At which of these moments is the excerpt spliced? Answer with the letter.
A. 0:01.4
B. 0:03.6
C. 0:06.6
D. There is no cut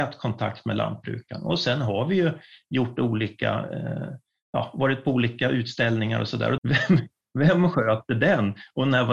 C